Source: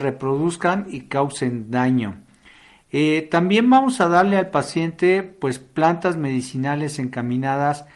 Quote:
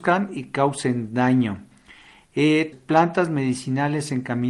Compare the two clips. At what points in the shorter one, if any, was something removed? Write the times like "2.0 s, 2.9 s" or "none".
2.7 s